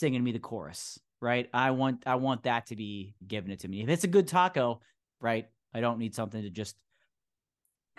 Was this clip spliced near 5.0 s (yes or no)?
yes